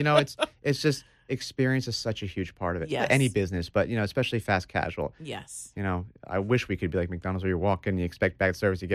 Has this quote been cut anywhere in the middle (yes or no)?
no